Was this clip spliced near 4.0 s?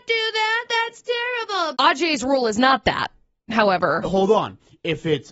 yes; 2 cuts; at 1.7 s, 4.0 s

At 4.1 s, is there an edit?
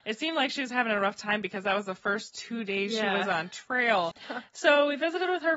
yes; 1 cut; at 4.1 s

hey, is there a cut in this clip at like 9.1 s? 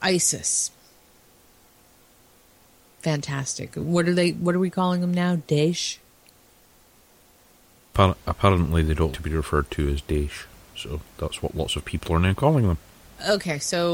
yes; 1 cut; at 9.1 s

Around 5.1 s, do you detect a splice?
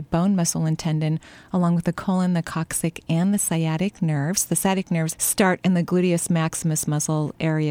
yes; 1 cut; at 5.1 s

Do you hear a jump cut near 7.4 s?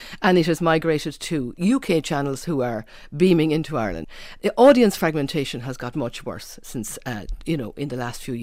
no; 1 cut; at 5.9 s

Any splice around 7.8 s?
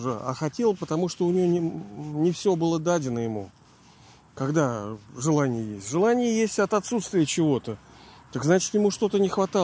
no; 0 cuts

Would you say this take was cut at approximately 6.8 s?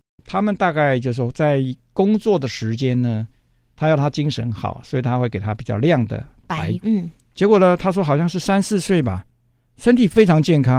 yes; 1 cut; at 6.8 s

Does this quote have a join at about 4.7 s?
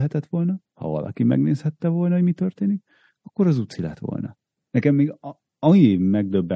yes; 1 cut; at 4.7 s

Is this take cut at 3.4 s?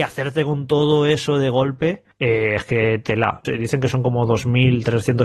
yes; 2 cuts; at 2.1 s, 3.4 s

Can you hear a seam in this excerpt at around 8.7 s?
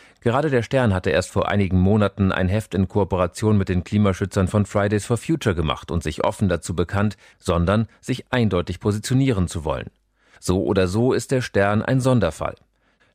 no; 2 cuts; at 7.3 s, 10.4 s

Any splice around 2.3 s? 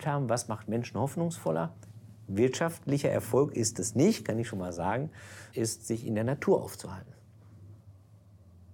no; 1 cut; at 5.5 s

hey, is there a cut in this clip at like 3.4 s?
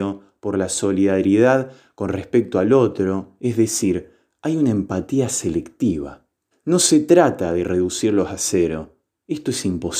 no; 1 cut; at 6.5 s

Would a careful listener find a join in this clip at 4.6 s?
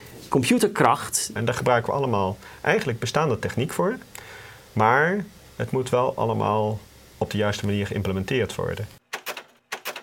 no; 1 cut; at 1.4 s

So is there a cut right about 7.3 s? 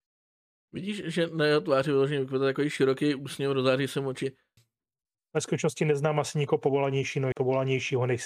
yes; 2 cuts; at 4.6 s, 7.3 s

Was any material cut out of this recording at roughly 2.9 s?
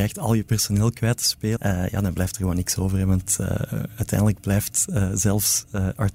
no; 1 cut; at 1.6 s

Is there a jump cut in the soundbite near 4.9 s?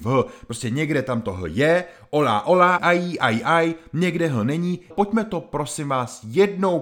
yes; 2 cuts; at 2.8 s, 4.9 s

